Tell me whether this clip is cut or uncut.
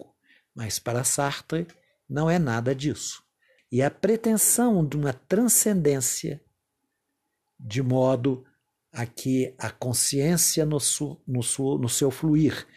cut